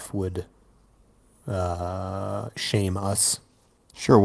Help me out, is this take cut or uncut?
uncut